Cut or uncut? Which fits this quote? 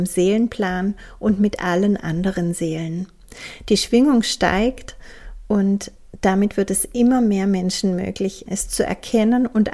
cut